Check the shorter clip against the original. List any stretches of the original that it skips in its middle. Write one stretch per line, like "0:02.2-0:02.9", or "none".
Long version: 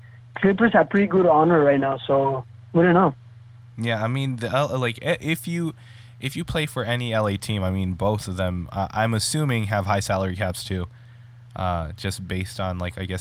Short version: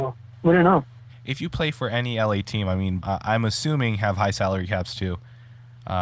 0:03.4-0:06.0
0:08.0-0:08.7